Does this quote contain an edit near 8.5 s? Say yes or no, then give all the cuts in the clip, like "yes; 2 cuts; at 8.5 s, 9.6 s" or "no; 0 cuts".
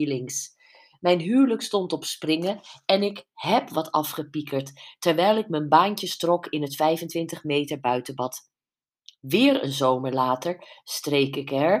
no; 0 cuts